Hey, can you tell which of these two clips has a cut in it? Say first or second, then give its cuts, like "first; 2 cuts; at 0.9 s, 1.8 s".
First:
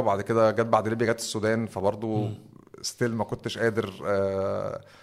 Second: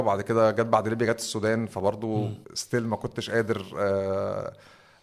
second; 1 cut; at 2.4 s